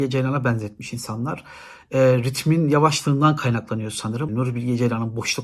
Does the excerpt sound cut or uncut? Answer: cut